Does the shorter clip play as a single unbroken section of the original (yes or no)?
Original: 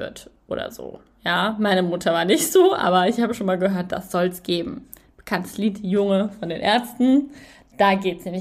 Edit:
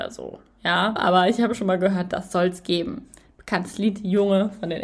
no